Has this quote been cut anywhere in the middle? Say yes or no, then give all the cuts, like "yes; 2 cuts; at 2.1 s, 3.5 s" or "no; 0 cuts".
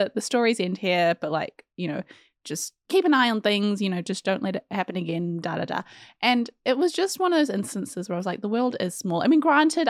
no; 0 cuts